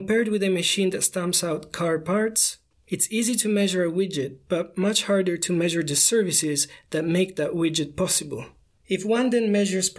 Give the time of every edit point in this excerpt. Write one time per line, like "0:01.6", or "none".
0:02.7
0:08.8